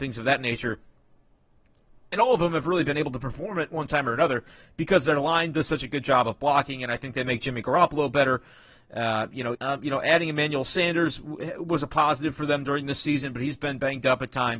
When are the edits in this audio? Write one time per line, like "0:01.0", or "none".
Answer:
0:09.5